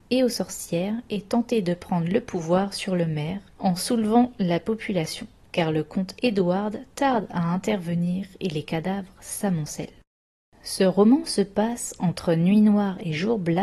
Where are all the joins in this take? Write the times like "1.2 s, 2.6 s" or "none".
none